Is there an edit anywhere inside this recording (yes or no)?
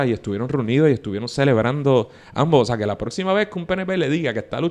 no